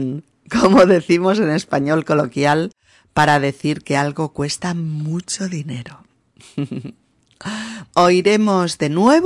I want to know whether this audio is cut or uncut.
cut